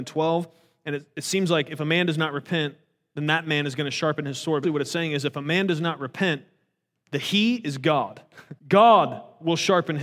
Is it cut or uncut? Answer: cut